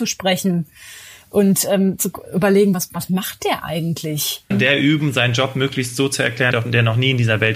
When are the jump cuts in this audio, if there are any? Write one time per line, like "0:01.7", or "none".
0:04.5
0:06.5